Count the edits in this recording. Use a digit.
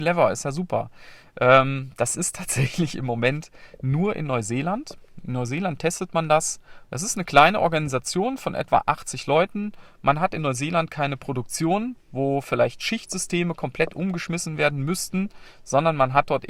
1